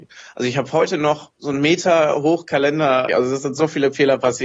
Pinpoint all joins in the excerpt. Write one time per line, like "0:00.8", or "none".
0:03.1